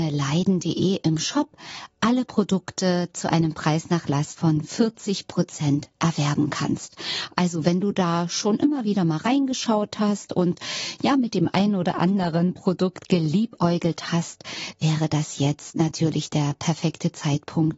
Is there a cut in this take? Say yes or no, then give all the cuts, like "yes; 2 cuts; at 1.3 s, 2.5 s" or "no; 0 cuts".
no; 0 cuts